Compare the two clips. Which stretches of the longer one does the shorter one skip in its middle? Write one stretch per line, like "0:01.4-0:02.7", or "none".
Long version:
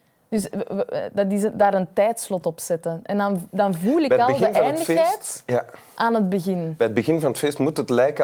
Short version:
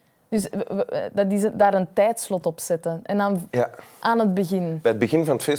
0:03.5-0:05.4

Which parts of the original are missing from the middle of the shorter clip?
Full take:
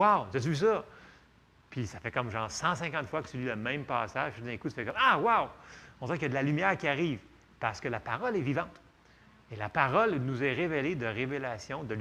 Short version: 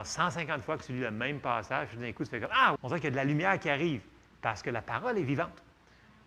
0:05.2-0:05.9

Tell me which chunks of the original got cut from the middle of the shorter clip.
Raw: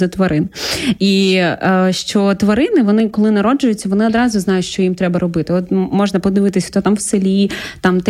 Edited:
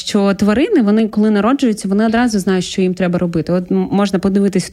none

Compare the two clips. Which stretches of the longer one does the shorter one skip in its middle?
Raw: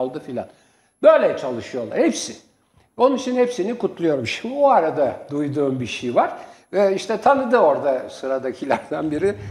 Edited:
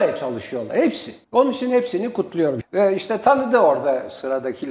0:02.5-0:02.9
0:04.3-0:06.6

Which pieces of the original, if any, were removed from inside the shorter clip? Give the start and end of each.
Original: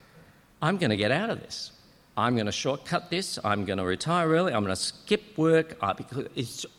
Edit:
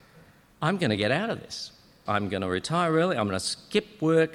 0:02.1-0:03.4

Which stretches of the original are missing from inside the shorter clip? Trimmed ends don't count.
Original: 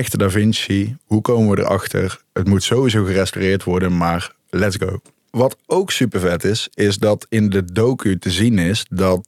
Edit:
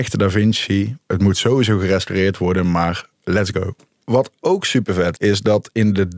0:01.0-0:02.3
0:06.4-0:06.7

